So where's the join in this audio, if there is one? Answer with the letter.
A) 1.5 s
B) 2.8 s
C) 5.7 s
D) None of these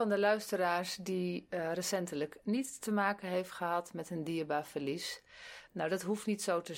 C